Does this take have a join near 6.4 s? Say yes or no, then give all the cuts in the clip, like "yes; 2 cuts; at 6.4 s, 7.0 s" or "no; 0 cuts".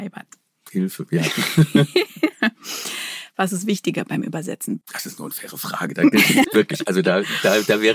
yes; 2 cuts; at 4.8 s, 6.4 s